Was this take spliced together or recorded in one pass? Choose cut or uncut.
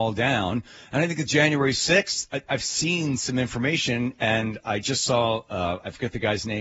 uncut